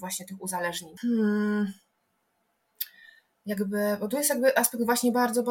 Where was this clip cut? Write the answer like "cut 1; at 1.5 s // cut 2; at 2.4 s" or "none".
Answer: cut 1; at 1.0 s